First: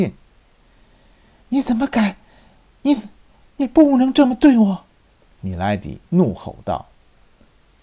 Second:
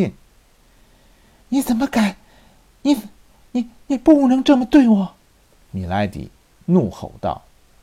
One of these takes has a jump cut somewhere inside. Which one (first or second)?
first